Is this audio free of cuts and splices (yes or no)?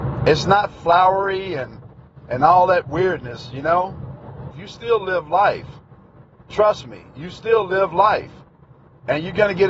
no